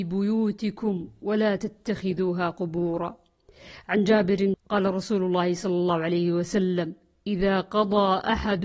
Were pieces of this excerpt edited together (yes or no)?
yes